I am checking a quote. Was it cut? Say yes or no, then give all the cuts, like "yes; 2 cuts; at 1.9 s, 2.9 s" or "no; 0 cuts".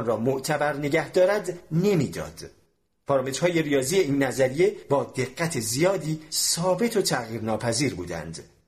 no; 0 cuts